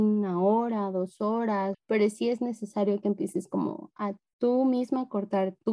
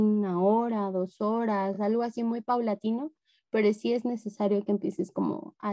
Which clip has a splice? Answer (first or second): first